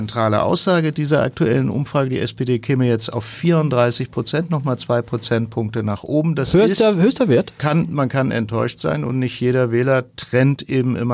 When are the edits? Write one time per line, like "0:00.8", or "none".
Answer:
0:07.6